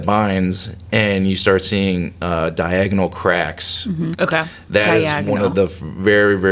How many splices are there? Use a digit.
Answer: 1